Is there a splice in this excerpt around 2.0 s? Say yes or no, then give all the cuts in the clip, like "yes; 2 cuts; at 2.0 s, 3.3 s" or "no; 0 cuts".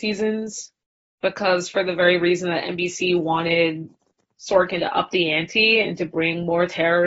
no; 0 cuts